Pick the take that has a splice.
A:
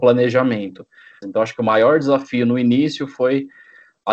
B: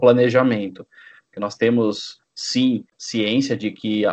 A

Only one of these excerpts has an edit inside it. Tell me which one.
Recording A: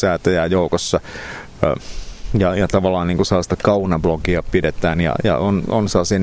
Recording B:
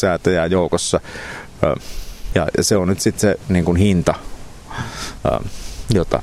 B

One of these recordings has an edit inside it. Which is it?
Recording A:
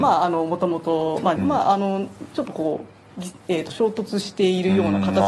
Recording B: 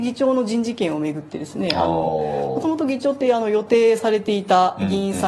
A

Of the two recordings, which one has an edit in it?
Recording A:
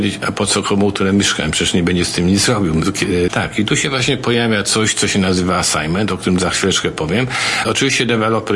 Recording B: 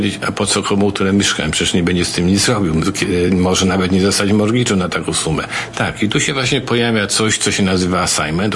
A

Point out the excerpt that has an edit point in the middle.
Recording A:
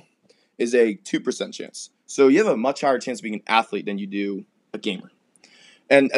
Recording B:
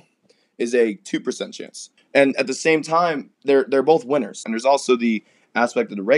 B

